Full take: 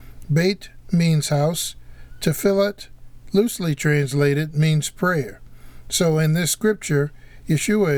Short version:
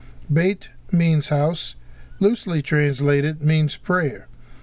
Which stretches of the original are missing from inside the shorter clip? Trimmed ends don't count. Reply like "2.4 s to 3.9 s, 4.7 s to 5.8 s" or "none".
2.2 s to 3.3 s